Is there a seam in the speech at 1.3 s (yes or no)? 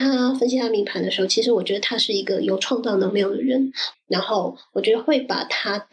no